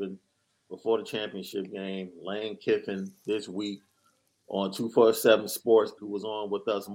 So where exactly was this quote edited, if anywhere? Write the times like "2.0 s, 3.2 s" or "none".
6.0 s